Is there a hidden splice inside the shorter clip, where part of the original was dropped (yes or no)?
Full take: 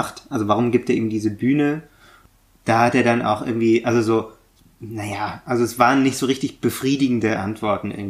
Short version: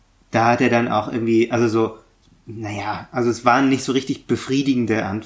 no